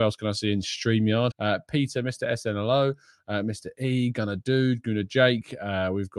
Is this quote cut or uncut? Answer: cut